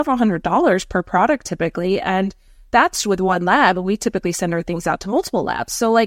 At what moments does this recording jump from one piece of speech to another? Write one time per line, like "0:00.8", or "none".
0:03.0

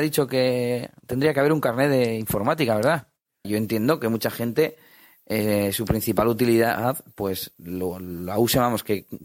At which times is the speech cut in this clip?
0:03.4

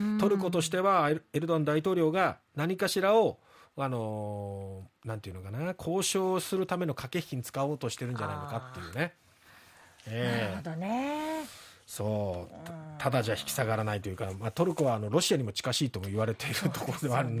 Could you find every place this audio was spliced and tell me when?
0:05.0

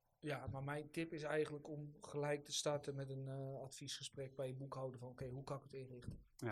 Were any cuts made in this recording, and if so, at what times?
none

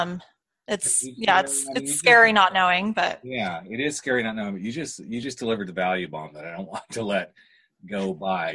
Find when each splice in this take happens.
none

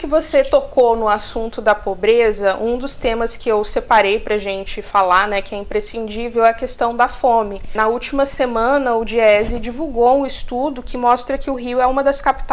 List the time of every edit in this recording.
none

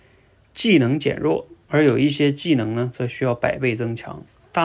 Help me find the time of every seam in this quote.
none

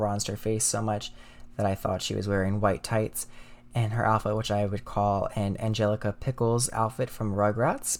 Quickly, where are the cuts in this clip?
none

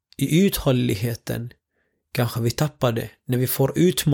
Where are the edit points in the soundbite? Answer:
none

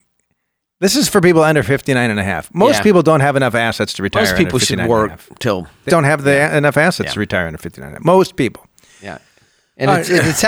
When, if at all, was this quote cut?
0:05.9

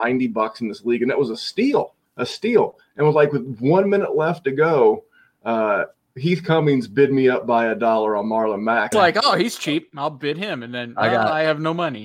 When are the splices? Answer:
0:02.0
0:08.9

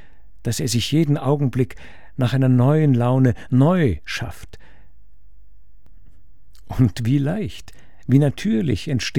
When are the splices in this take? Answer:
none

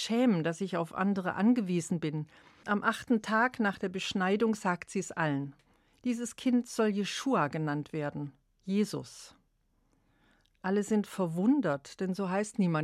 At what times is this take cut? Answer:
0:02.6

